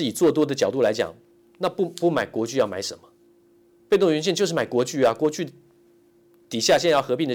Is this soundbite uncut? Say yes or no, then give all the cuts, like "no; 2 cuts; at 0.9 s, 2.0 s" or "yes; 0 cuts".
yes; 0 cuts